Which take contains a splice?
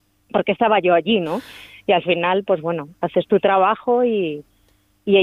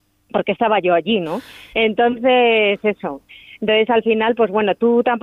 second; 1 cut; at 1.7 s

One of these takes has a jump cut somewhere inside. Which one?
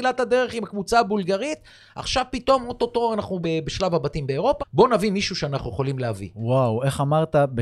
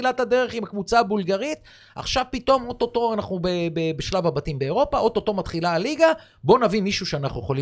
first; 2 cuts; at 3.4 s, 4.6 s

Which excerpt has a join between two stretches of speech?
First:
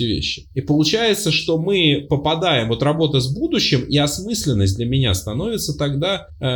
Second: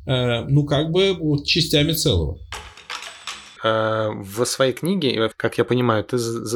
second; 2 cuts; at 3.6 s, 5.3 s

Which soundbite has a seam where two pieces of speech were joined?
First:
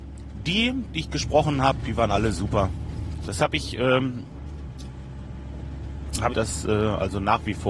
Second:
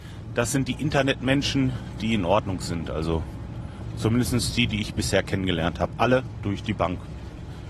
first; 2 cuts; at 3.2 s, 6.3 s

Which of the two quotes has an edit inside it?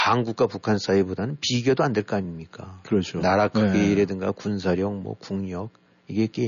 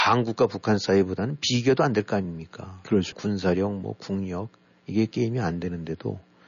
second; 1 cut; at 3.1 s

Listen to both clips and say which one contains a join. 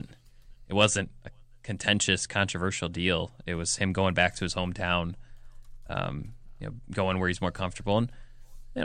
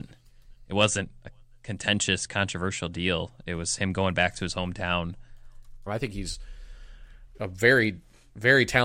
second; 1 cut; at 5.9 s

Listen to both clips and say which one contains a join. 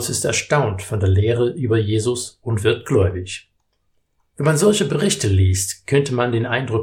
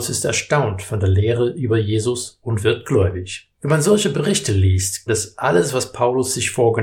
second; 2 cuts; at 3.5 s, 5.1 s

